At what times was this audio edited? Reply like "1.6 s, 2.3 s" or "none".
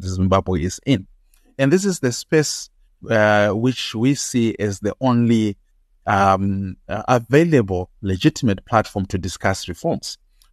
none